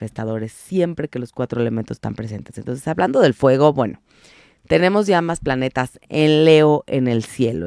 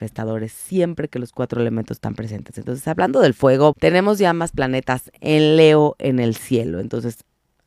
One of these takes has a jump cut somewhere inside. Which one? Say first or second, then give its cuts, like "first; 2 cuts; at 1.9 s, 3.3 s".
second; 1 cut; at 3.7 s